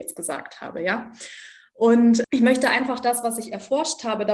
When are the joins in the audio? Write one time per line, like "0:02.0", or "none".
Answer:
0:02.2